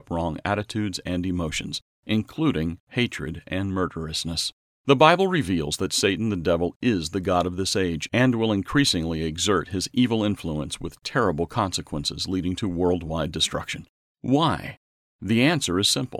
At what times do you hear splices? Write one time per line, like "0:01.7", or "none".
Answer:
0:04.7
0:14.1